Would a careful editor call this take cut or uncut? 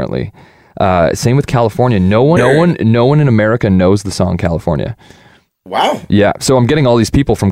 cut